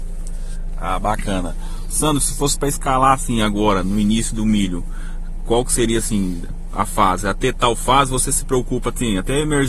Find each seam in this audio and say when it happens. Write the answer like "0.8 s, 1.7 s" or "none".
none